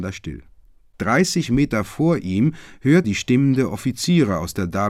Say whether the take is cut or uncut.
cut